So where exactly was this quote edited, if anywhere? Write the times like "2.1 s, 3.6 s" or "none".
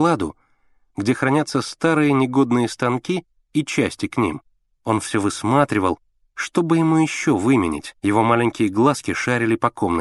4.7 s, 8.0 s